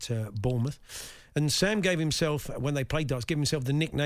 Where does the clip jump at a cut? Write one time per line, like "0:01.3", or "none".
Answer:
none

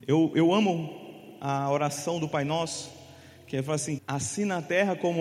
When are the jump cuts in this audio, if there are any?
0:04.0

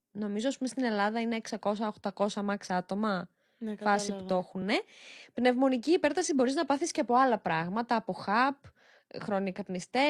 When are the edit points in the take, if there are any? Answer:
none

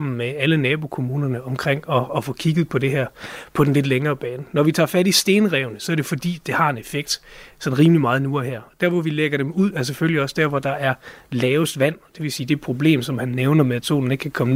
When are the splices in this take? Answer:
none

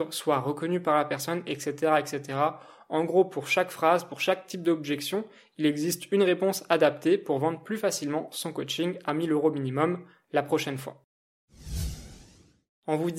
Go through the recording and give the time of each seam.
none

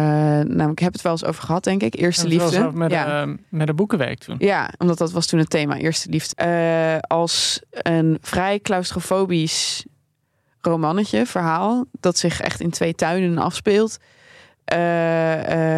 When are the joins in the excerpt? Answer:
0:06.3

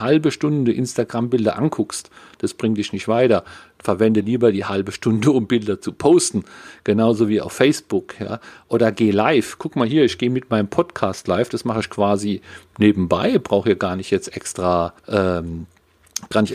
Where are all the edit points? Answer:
0:15.0

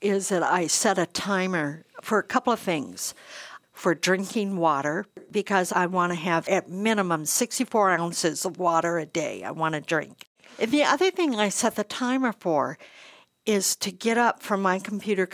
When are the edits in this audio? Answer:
none

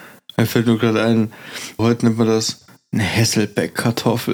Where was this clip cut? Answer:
0:01.8

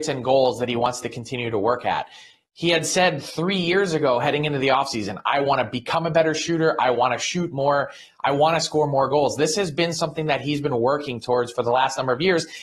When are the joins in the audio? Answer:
none

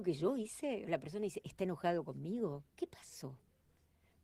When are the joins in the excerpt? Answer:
0:02.7

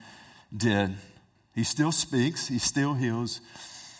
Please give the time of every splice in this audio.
0:01.3

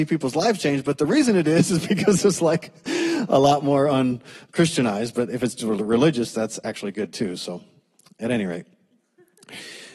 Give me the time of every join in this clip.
none

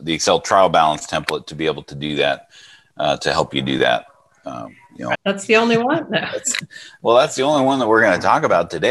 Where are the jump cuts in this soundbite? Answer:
0:05.1

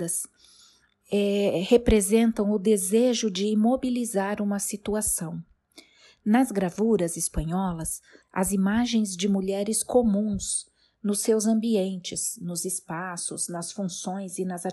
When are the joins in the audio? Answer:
0:08.2

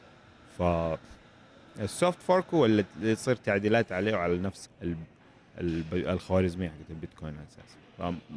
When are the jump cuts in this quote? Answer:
0:04.6

